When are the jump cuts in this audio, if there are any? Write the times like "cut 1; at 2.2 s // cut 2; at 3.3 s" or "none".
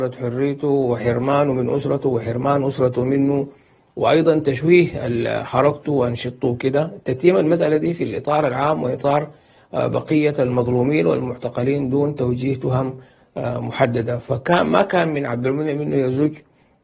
none